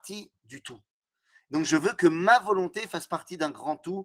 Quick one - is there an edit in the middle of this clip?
no; 0 cuts

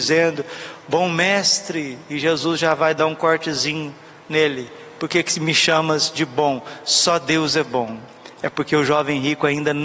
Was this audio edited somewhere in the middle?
no; 0 cuts

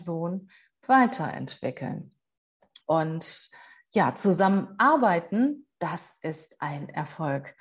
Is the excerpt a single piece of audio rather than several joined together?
no; 1 cut; at 2.8 s

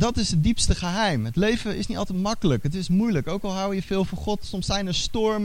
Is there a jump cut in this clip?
no; 0 cuts

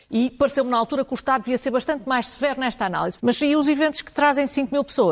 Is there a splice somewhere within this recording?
yes; 1 cut; at 3.2 s

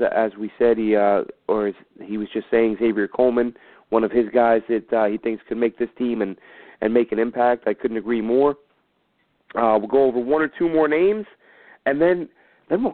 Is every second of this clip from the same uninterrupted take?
yes; 0 cuts

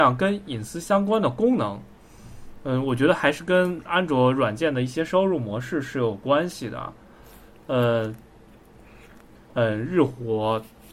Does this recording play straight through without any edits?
no; 1 cut; at 9.4 s

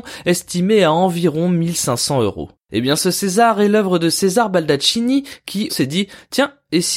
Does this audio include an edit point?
yes; 1 cut; at 5.7 s

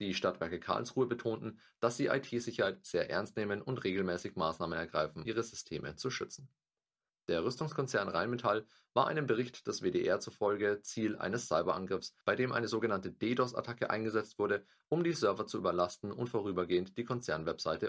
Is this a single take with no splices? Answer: no; 2 cuts; at 5.3 s, 7.1 s

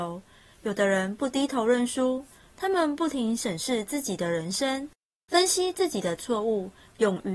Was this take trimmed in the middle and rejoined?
no; 0 cuts

